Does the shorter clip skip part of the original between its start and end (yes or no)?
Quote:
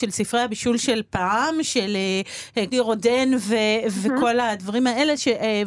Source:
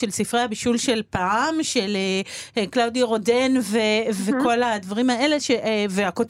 yes